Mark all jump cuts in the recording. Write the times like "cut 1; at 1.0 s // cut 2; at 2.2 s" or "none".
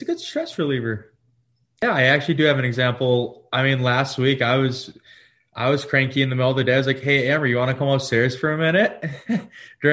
none